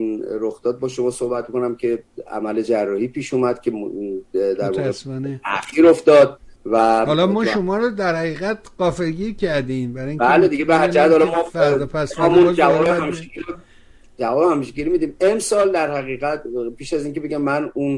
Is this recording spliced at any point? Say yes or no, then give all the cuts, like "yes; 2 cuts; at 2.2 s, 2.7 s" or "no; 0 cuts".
yes; 1 cut; at 6.6 s